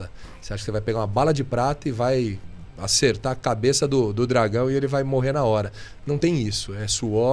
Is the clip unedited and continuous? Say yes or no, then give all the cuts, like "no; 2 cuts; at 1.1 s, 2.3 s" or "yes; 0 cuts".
yes; 0 cuts